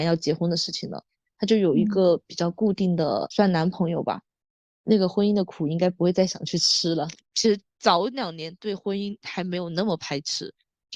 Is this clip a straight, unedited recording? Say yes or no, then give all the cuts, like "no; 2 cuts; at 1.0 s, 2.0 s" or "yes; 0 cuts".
no; 1 cut; at 7.2 s